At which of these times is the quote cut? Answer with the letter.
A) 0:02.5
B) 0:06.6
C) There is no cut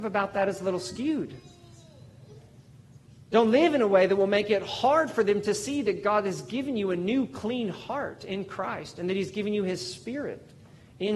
C